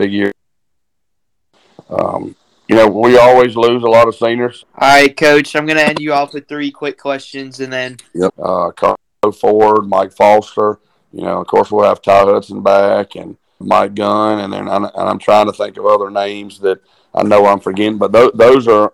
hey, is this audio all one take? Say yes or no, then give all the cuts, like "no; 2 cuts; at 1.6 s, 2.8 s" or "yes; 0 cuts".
no; 3 cuts; at 4.6 s, 8.3 s, 13.6 s